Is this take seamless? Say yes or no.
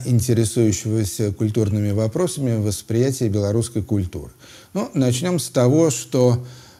yes